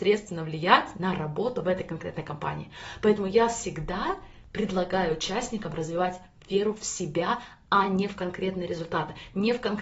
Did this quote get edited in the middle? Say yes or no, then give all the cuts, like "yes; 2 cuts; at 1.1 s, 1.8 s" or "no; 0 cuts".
no; 0 cuts